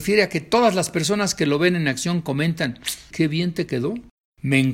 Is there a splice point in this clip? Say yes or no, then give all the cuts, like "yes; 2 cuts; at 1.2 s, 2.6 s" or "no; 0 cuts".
yes; 1 cut; at 3.1 s